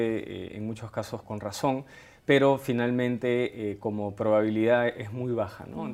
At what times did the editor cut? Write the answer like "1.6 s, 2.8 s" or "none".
1.2 s